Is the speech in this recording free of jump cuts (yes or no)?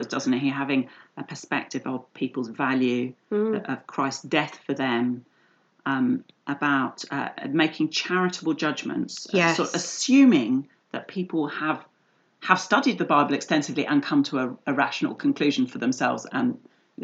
yes